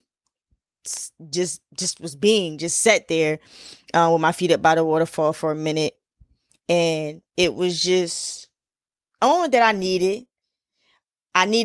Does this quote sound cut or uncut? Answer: uncut